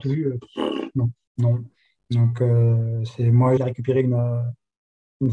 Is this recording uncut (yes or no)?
no